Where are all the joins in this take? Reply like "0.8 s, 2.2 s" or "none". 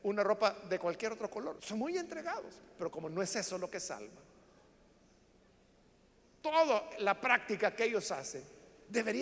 1.6 s